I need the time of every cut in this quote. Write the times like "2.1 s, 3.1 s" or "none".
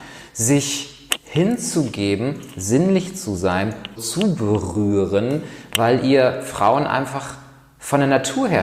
4.0 s